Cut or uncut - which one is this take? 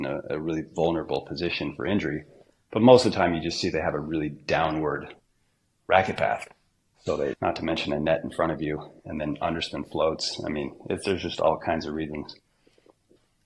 cut